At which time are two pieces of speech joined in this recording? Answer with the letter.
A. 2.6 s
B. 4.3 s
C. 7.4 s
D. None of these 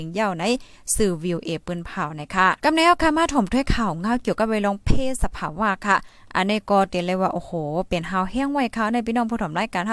A